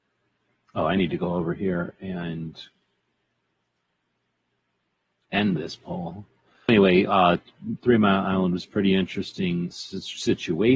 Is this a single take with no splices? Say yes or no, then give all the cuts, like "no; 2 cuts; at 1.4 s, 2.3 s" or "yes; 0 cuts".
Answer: no; 2 cuts; at 6.7 s, 9.7 s